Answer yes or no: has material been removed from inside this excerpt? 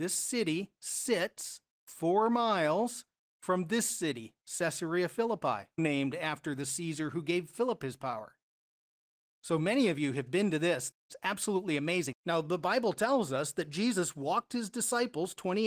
yes